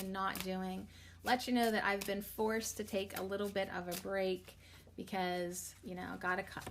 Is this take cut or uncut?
uncut